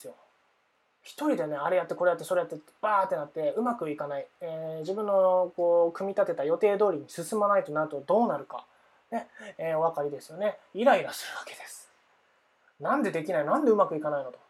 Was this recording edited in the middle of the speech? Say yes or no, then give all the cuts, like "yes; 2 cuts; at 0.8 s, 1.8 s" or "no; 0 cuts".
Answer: no; 0 cuts